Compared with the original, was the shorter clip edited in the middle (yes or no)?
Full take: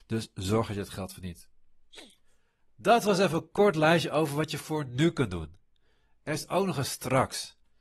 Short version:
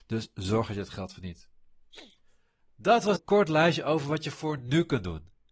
yes